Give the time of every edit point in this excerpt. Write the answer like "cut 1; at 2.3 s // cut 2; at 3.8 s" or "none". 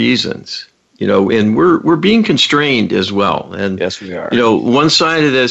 none